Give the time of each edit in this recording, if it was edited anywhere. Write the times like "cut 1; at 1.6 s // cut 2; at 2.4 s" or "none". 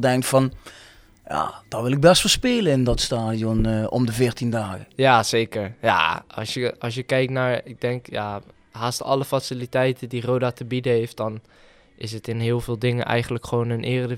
cut 1; at 4.9 s